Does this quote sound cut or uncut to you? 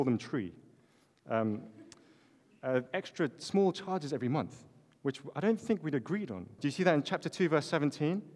cut